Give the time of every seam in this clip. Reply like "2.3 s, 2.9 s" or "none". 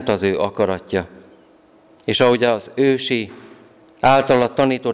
none